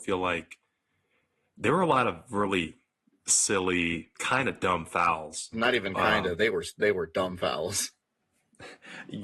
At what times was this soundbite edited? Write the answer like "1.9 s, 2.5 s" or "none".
4.1 s, 5.5 s